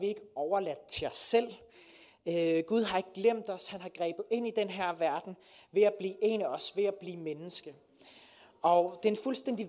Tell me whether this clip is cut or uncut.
uncut